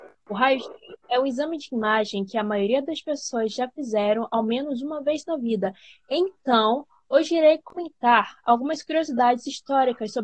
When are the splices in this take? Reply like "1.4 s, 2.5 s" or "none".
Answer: 1.0 s